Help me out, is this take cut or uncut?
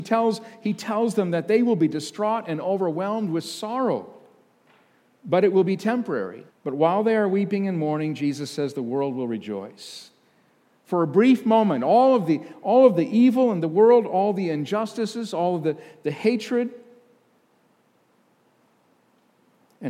cut